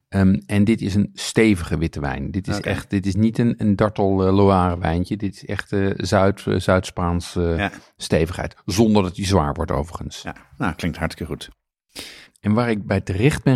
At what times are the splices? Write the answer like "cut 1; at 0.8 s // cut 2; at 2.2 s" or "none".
cut 1; at 12.3 s

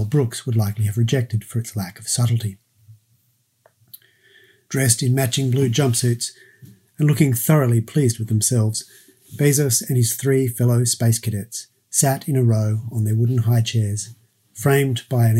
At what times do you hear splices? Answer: none

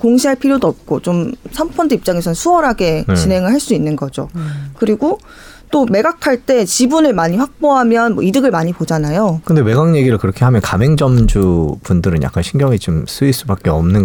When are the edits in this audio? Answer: cut 1; at 9.4 s

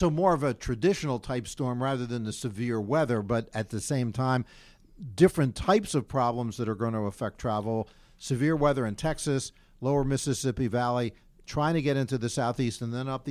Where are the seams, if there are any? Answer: none

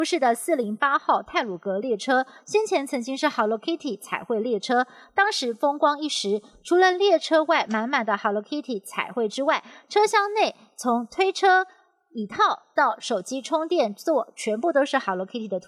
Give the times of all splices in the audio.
none

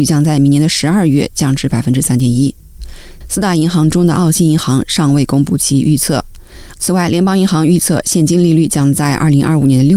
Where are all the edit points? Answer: cut 1; at 3.2 s // cut 2; at 6.7 s

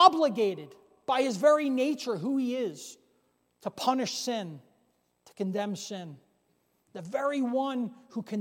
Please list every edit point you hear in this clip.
none

